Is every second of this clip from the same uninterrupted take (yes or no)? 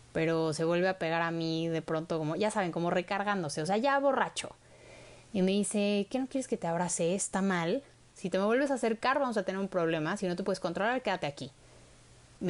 no